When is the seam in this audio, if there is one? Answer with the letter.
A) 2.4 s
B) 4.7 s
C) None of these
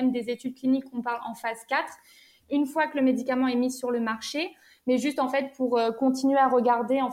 A